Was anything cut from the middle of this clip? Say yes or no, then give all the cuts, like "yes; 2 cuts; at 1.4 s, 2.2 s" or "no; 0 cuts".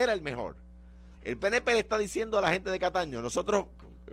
yes; 1 cut; at 1.1 s